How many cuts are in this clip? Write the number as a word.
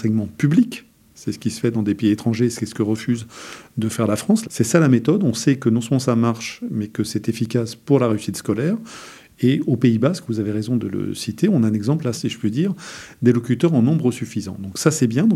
two